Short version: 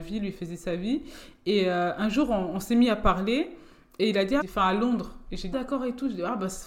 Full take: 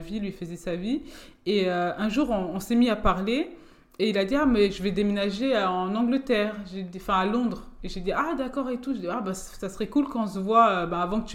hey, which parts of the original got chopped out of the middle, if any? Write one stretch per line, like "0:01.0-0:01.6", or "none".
0:04.4-0:06.9
0:08.0-0:08.4